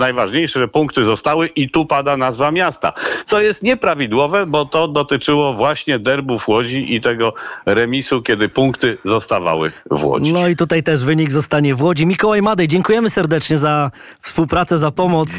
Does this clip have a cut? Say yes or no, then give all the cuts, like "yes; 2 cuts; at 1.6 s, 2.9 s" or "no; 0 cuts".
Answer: no; 0 cuts